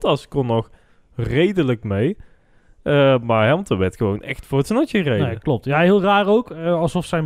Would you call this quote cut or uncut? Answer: uncut